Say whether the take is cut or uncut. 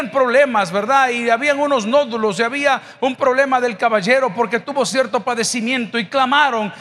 uncut